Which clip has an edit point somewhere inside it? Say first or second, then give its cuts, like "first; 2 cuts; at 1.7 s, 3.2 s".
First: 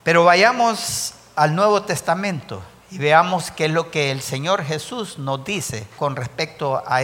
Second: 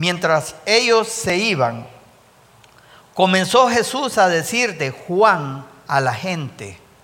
first; 1 cut; at 6.0 s